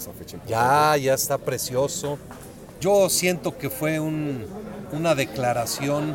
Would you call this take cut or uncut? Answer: cut